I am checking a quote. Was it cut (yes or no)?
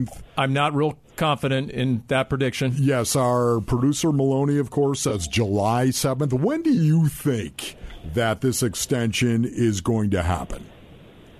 no